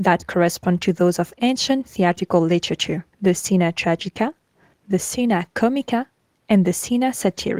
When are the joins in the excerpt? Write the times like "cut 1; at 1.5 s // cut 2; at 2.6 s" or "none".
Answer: cut 1; at 3.1 s

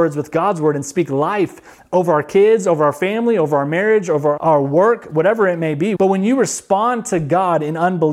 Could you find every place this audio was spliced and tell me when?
cut 1; at 4.4 s // cut 2; at 6.0 s

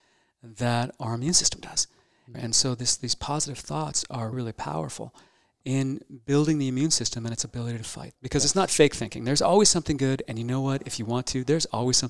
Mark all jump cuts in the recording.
cut 1; at 2.3 s // cut 2; at 4.3 s // cut 3; at 8.1 s

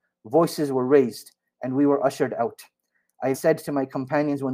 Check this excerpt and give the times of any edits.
cut 1; at 3.3 s

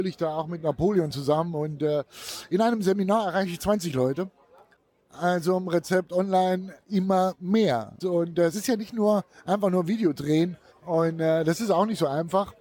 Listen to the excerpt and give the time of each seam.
cut 1; at 6.8 s // cut 2; at 8.0 s // cut 3; at 10.7 s

